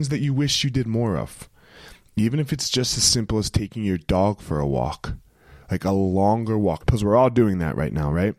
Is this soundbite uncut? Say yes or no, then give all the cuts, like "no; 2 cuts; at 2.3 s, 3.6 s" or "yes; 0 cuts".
no; 1 cut; at 6.8 s